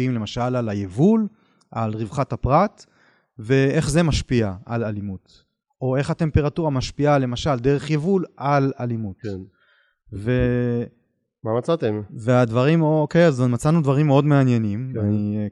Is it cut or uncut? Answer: uncut